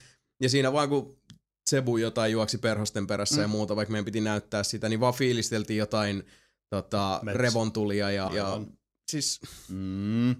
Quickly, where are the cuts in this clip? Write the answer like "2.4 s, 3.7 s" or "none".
8.3 s